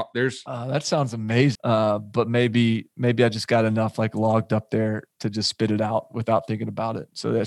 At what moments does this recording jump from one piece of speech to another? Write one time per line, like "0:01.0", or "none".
0:01.5

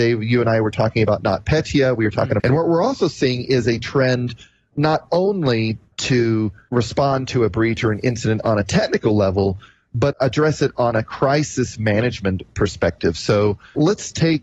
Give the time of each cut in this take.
0:02.4
0:10.1

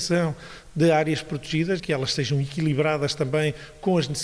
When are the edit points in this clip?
0:01.8

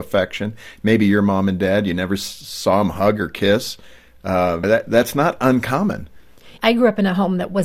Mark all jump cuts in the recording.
0:04.6
0:06.6

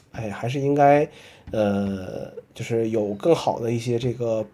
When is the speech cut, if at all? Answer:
none

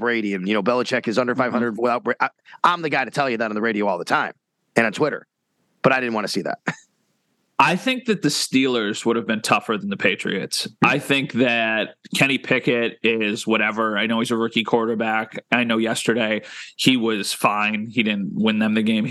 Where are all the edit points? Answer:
none

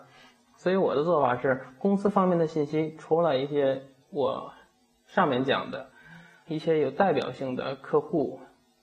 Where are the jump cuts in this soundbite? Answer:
0:06.5

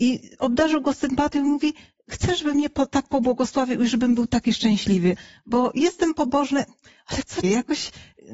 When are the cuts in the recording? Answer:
0:07.4

